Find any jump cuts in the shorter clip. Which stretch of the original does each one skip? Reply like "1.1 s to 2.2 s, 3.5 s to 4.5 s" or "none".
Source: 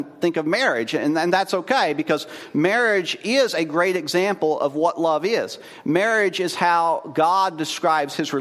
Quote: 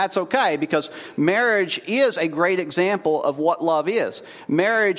none